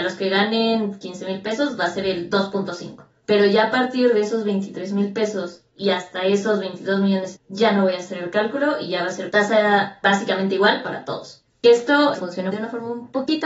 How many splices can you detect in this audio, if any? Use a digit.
2